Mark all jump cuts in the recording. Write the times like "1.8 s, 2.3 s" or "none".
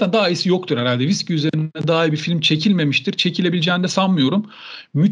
none